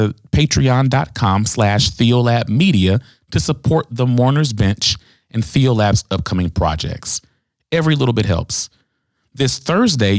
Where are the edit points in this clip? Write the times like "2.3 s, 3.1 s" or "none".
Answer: none